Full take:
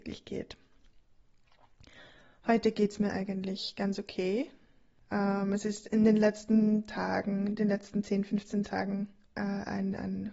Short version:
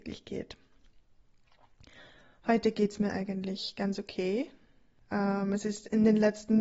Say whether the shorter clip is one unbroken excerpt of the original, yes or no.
yes